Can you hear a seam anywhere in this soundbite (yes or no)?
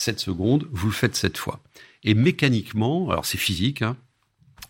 no